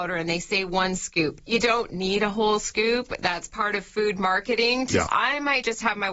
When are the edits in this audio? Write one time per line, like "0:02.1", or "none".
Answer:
0:05.1